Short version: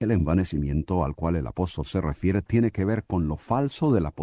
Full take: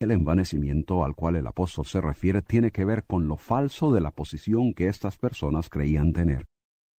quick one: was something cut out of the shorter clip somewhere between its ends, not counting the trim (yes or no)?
no